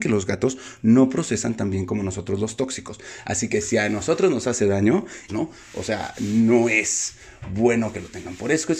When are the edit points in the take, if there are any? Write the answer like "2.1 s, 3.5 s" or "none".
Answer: 5.3 s